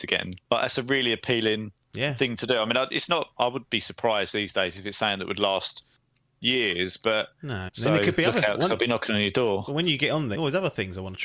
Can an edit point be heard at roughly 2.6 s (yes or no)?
no